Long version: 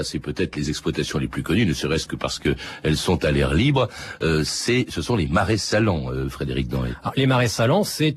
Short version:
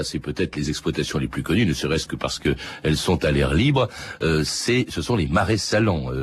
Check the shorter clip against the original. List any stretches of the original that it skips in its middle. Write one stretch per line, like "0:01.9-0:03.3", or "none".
none